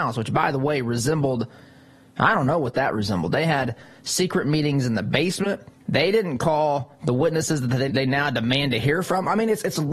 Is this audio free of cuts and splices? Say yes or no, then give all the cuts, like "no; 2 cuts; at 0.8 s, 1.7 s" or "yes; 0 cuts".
no; 2 cuts; at 5.8 s, 7.9 s